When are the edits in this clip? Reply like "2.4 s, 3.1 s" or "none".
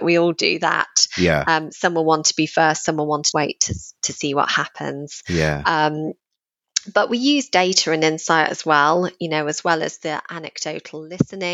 3.3 s